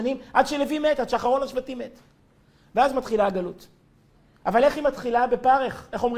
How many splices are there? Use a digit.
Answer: 0